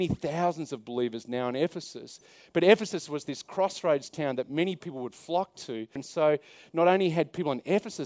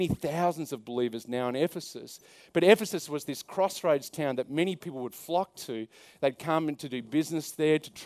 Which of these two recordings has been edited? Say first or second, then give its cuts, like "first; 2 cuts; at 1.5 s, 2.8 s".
first; 1 cut; at 6.0 s